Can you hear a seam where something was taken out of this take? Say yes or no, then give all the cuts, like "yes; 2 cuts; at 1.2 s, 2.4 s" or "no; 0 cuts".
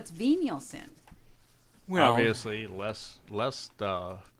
no; 0 cuts